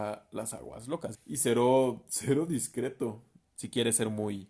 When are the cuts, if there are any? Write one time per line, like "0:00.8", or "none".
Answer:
0:01.1
0:03.4